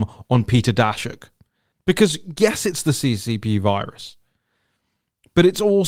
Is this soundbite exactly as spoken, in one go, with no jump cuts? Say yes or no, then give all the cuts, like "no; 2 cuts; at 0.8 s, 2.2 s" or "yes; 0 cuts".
no; 1 cut; at 1.7 s